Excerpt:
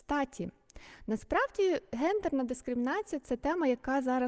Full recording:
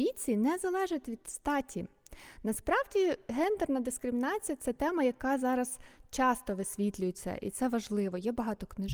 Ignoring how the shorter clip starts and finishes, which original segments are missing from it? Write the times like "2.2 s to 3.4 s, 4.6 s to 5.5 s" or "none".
none